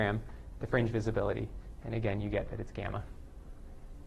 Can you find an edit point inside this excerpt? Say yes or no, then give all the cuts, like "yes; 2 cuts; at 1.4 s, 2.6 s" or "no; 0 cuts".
no; 0 cuts